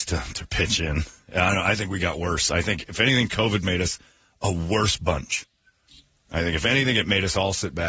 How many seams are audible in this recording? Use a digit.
0